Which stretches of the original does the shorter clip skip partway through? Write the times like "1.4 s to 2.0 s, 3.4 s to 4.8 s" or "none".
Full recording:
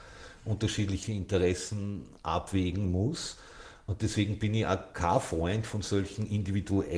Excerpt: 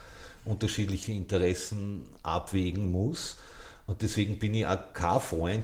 none